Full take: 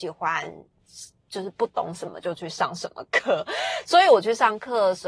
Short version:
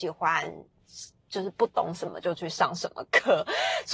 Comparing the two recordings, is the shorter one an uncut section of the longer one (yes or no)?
yes